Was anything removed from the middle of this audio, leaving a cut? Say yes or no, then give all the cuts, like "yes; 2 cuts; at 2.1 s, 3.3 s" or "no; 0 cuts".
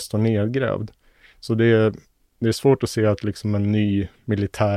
no; 0 cuts